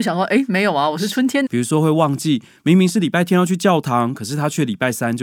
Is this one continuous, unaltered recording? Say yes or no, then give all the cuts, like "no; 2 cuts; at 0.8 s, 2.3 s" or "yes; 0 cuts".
no; 1 cut; at 1.5 s